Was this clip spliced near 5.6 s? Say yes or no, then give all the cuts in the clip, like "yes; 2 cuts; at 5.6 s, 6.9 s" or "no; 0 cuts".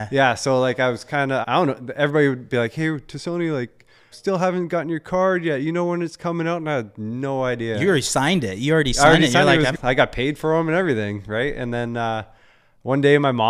no; 3 cuts; at 1.4 s, 4.1 s, 9.7 s